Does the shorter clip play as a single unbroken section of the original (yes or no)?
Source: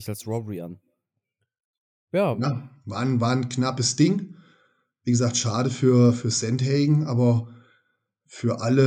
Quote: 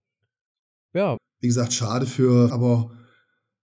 no